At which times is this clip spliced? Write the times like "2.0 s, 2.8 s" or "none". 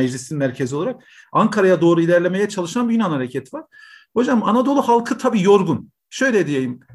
none